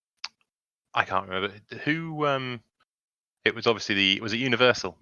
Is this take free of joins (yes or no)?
yes